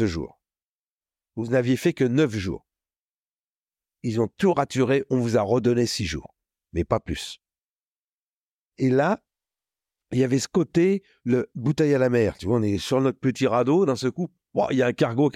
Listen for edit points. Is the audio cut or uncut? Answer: cut